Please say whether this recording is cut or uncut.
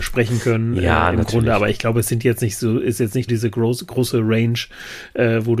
cut